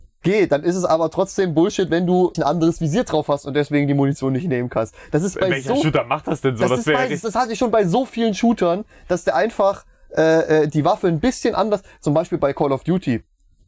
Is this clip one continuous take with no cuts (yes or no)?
no